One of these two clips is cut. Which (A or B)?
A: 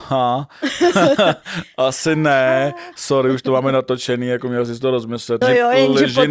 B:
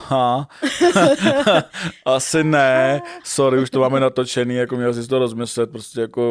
A